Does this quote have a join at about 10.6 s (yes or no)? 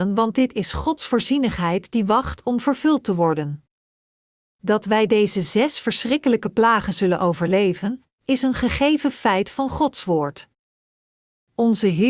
no